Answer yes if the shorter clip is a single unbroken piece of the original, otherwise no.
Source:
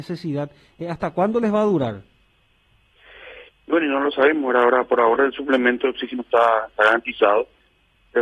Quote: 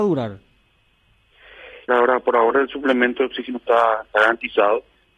no